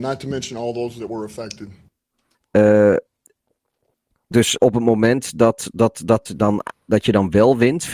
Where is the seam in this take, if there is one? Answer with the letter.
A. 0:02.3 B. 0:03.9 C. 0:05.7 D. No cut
A